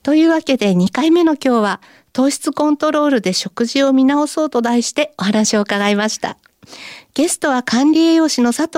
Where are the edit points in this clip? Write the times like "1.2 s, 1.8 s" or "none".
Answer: none